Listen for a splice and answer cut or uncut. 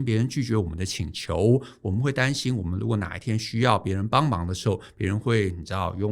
uncut